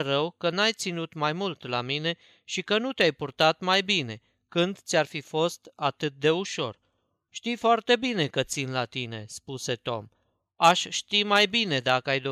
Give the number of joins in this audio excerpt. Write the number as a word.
one